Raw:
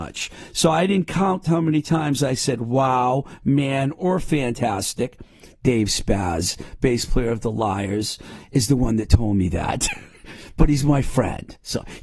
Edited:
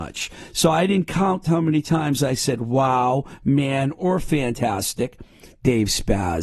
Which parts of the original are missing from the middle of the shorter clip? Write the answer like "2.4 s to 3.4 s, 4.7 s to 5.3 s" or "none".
none